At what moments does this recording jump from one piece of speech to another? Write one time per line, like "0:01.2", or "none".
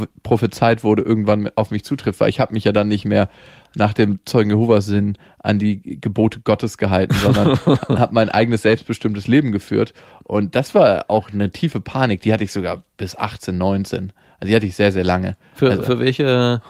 none